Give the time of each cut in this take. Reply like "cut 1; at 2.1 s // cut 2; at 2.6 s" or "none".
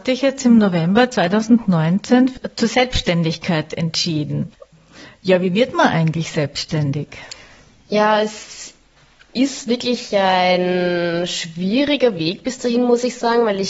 none